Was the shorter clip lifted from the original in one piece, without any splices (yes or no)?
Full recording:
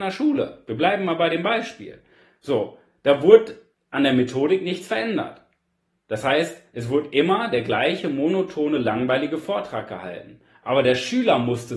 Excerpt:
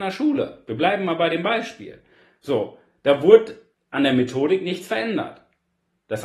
yes